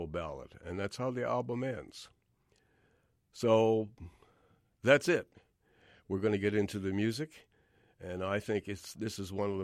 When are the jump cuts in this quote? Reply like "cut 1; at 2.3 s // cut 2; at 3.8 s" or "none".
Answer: none